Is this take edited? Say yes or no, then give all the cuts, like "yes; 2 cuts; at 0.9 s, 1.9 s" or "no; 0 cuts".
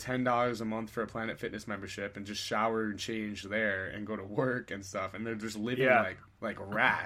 no; 0 cuts